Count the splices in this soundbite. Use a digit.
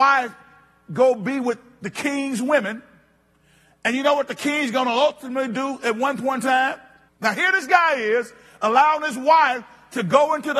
1